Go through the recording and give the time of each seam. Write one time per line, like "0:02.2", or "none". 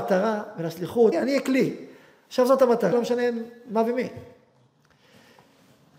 0:01.1
0:02.9